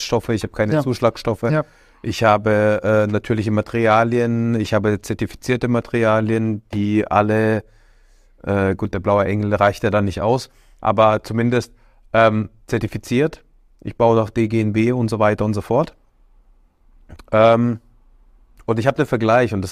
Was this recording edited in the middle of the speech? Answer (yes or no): no